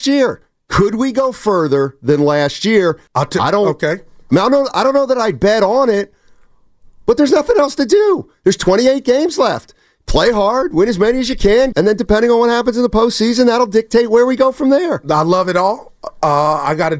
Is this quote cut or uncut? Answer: cut